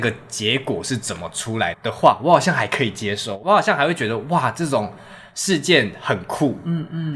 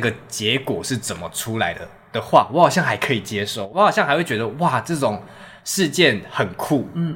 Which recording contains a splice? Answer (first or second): first